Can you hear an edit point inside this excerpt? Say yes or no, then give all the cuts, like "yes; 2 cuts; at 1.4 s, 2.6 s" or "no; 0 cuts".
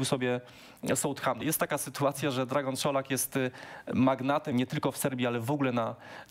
yes; 2 cuts; at 1.4 s, 4.5 s